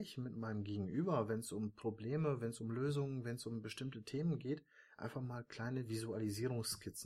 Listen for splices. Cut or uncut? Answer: uncut